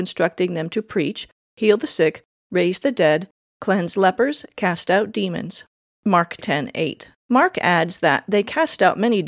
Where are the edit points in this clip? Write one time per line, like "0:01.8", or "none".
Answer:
0:07.2